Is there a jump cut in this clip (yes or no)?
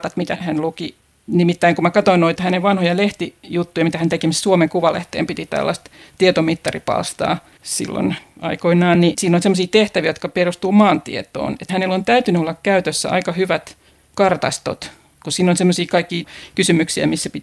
no